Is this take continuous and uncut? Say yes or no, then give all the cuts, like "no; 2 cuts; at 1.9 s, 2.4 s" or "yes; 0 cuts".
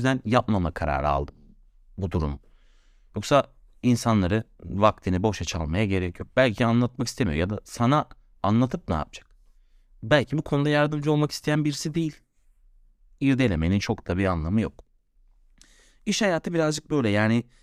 yes; 0 cuts